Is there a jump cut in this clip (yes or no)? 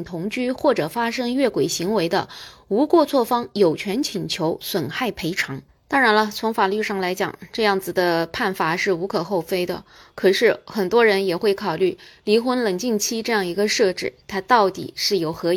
no